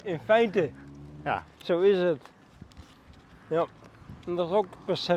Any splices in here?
no; 0 cuts

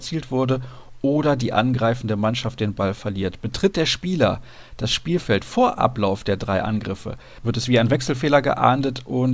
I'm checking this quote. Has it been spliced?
no; 0 cuts

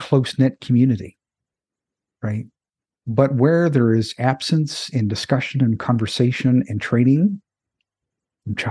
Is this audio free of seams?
yes; 0 cuts

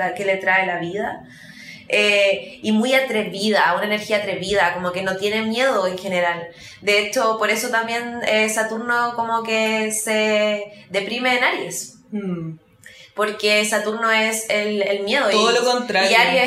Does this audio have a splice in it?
no; 0 cuts

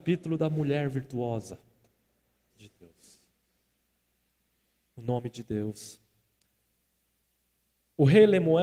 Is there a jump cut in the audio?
yes; 1 cut; at 2.5 s

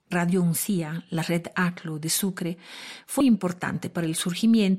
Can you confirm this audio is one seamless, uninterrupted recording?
no; 1 cut; at 3.2 s

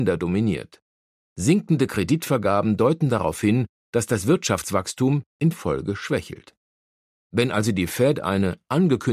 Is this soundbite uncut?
no; 2 cuts; at 1.2 s, 7.2 s

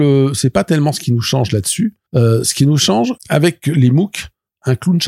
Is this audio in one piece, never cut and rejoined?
no; 2 cuts; at 2.0 s, 3.2 s

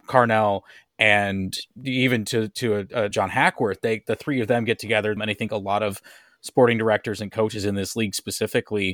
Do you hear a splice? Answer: yes; 2 cuts; at 3.1 s, 5.2 s

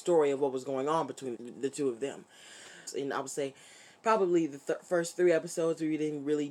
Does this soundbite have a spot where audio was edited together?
yes; 2 cuts; at 1.3 s, 2.9 s

